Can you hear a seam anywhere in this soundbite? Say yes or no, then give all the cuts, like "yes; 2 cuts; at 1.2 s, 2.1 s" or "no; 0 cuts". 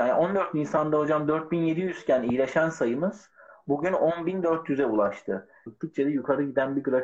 yes; 1 cut; at 5.7 s